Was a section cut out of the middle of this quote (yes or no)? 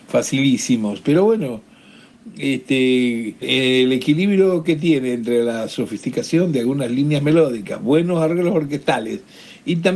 yes